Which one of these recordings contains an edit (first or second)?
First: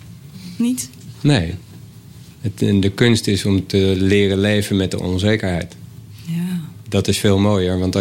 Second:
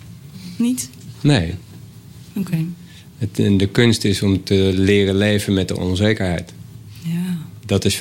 first